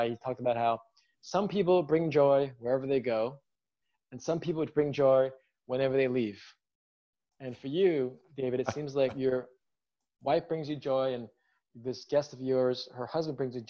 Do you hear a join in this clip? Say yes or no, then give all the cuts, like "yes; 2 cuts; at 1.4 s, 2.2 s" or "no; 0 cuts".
no; 0 cuts